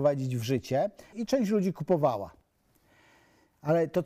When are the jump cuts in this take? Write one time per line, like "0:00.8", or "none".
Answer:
0:01.1